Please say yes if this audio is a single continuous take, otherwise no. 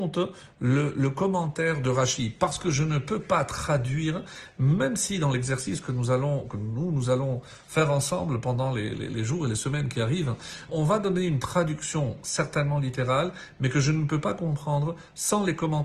no